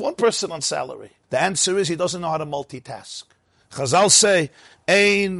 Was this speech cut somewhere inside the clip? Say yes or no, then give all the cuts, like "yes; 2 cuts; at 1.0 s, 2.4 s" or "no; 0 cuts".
yes; 1 cut; at 1.2 s